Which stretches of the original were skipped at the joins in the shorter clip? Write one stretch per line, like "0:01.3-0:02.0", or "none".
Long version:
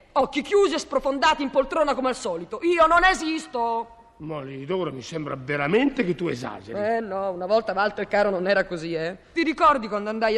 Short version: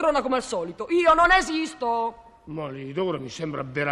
none